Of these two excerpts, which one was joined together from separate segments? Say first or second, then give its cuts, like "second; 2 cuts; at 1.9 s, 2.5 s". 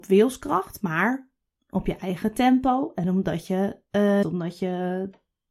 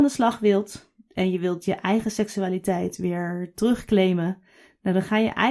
first; 1 cut; at 4.2 s